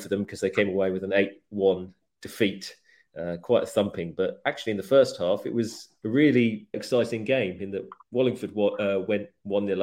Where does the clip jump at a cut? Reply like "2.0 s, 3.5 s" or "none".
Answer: 6.7 s